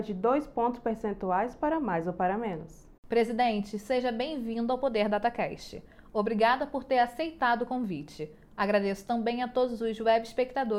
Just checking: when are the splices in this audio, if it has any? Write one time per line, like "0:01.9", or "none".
0:03.0